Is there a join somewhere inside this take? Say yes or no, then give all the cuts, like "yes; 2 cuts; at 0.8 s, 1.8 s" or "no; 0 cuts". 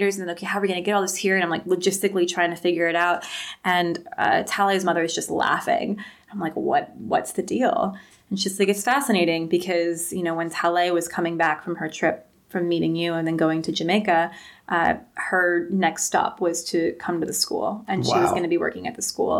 no; 0 cuts